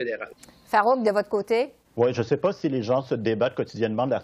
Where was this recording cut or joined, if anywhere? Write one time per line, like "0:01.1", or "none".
0:01.8